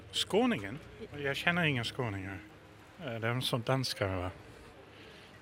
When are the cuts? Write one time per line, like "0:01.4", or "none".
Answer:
0:01.1